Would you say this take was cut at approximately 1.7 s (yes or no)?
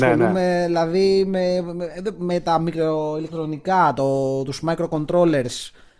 no